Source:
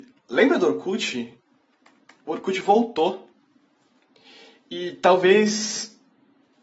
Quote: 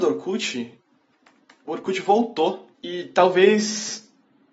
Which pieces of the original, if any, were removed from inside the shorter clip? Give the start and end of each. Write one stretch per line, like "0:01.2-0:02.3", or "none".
0:03.3-0:04.6